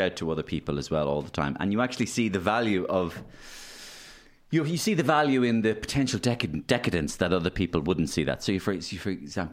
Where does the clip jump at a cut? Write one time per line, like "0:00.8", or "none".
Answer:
none